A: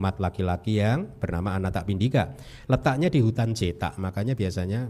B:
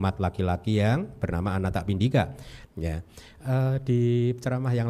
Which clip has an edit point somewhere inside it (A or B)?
B